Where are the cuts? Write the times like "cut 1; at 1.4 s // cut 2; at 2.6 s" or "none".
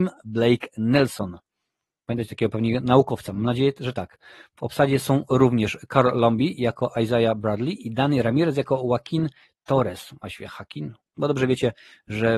cut 1; at 2.0 s // cut 2; at 11.0 s

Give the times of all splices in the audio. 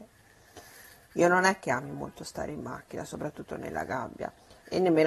cut 1; at 1.1 s

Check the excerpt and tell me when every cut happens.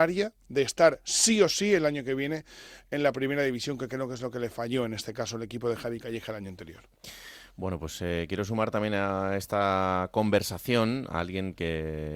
none

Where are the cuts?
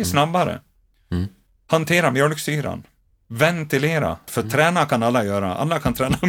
cut 1; at 4.3 s

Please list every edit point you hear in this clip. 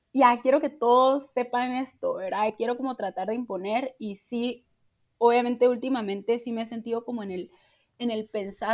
none

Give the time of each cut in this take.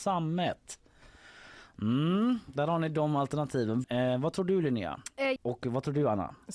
cut 1; at 3.8 s // cut 2; at 5.4 s

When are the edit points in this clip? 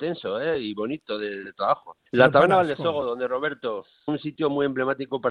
cut 1; at 2.1 s // cut 2; at 4.1 s

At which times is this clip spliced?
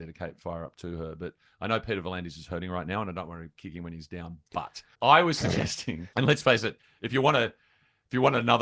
cut 1; at 4.9 s // cut 2; at 6.1 s

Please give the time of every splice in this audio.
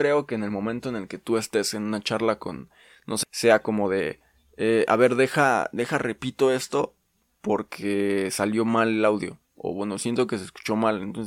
cut 1; at 3.2 s

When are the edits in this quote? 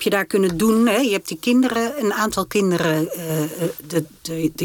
none

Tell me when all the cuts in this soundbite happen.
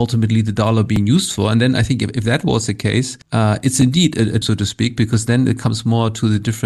cut 1; at 3.2 s // cut 2; at 4.4 s

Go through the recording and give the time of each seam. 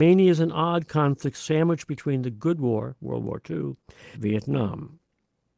cut 1; at 4.1 s

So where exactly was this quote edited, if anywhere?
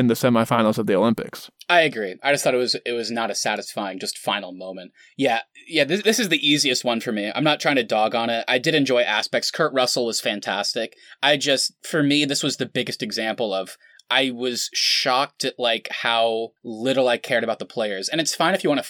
cut 1; at 16.6 s

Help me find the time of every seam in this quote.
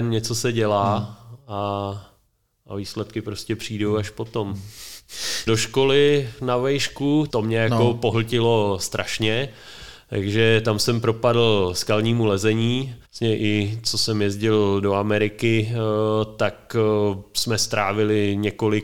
cut 1; at 5.5 s // cut 2; at 7.3 s // cut 3; at 13.0 s

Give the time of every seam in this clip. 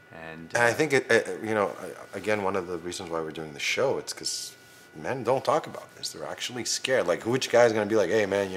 none

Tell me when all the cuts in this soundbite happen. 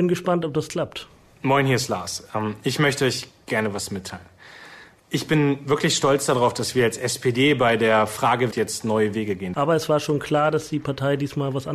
cut 1; at 8.5 s // cut 2; at 9.5 s

